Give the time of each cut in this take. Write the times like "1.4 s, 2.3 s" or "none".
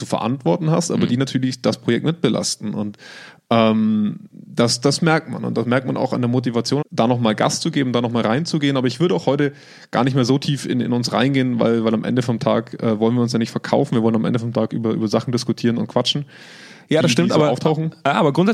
6.8 s